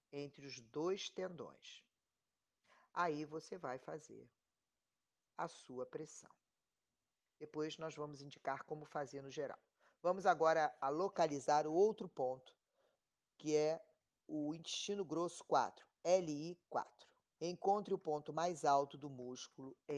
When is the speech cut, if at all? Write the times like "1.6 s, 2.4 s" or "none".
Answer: 17.4 s